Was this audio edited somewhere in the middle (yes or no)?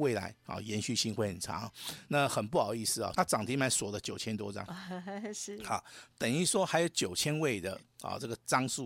yes